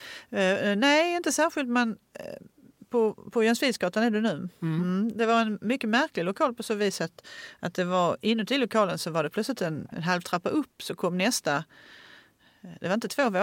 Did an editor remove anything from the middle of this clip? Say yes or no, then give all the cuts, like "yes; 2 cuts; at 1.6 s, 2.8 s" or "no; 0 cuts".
no; 0 cuts